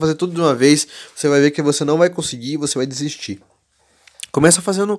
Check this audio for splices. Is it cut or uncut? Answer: uncut